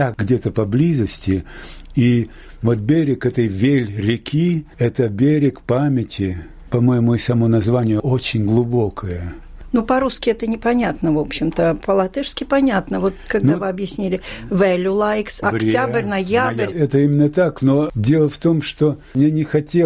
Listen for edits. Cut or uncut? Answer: cut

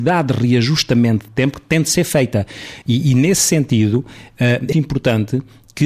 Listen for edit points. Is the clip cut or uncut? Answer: cut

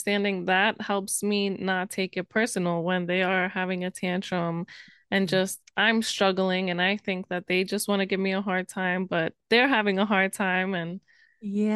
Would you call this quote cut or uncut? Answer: uncut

